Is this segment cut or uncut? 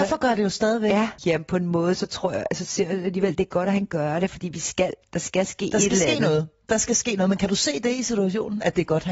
cut